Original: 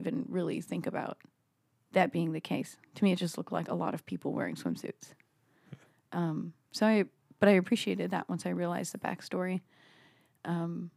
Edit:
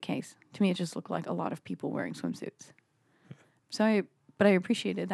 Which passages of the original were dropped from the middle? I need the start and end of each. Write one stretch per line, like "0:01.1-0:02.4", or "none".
0:06.0-0:06.6